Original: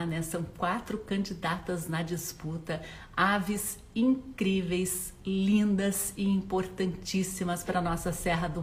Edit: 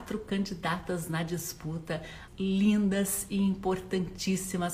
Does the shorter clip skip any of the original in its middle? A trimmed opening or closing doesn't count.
yes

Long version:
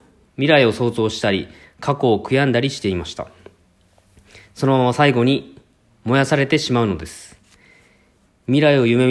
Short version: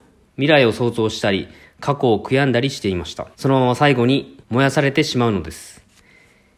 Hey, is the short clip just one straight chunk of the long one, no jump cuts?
no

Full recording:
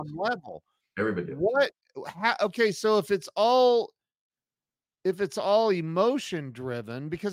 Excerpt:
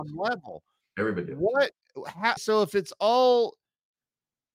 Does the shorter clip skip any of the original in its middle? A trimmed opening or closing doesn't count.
yes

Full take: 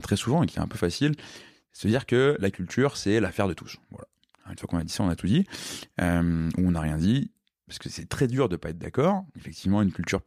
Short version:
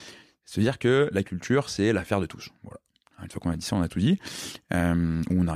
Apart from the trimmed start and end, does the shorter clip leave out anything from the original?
no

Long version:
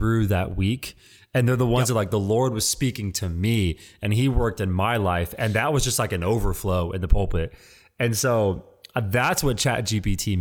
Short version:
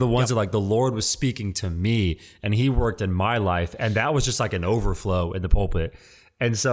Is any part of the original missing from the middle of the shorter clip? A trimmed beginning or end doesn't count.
no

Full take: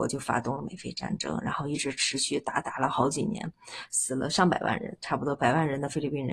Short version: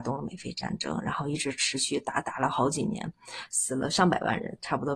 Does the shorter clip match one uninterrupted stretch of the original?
yes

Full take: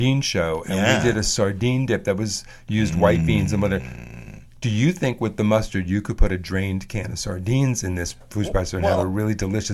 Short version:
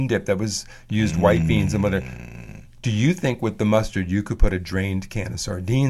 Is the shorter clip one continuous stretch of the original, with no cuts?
yes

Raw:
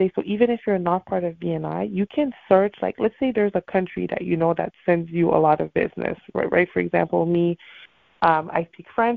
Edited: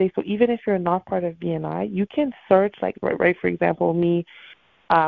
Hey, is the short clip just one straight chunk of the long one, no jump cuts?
no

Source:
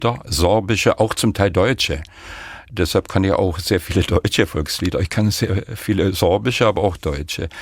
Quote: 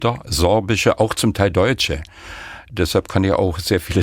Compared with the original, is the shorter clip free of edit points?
yes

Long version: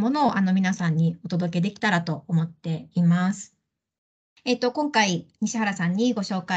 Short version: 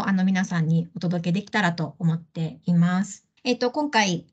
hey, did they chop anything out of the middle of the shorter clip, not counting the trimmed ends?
yes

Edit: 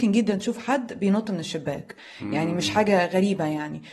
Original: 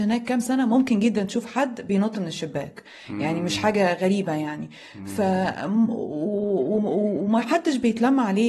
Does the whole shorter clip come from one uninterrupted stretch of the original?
yes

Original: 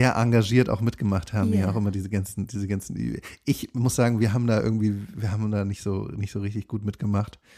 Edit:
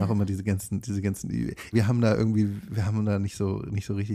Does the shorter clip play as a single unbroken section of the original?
no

